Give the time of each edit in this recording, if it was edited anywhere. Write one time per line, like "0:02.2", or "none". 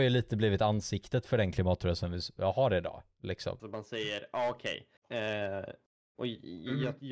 0:03.6
0:05.0